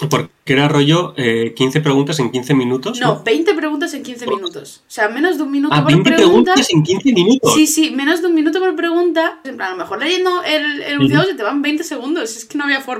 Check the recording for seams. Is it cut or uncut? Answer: cut